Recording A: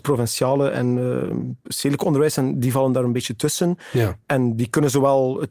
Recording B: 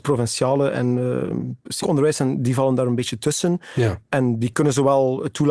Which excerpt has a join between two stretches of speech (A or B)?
B